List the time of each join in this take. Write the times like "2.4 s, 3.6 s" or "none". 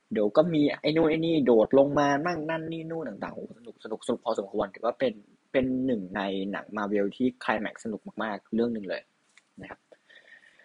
none

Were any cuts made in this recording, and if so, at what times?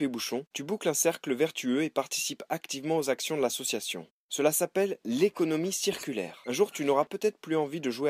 4.3 s, 6.4 s

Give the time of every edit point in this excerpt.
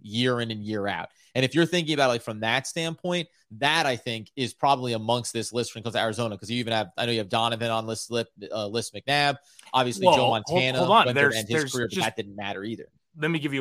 none

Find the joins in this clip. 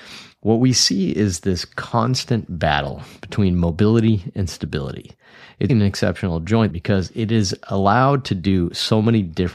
5.7 s, 6.7 s

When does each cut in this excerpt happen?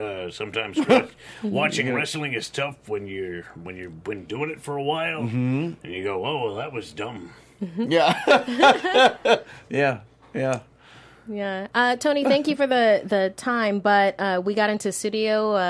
none

